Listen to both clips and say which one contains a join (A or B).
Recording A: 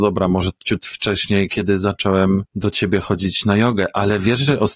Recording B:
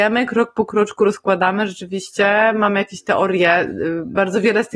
A